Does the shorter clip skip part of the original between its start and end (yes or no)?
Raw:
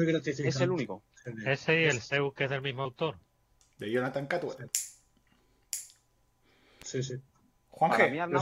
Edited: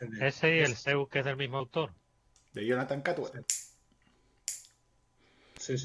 no